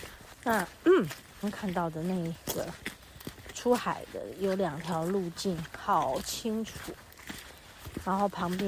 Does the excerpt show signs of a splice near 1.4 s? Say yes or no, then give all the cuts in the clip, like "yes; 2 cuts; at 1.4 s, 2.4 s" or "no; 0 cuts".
yes; 1 cut; at 1.4 s